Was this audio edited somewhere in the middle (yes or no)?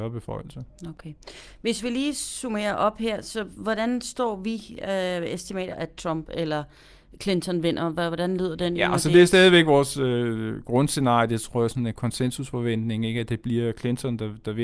yes